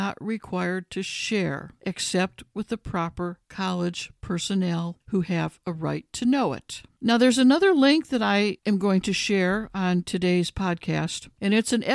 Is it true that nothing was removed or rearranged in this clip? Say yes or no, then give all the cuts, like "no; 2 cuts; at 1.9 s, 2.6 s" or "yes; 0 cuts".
yes; 0 cuts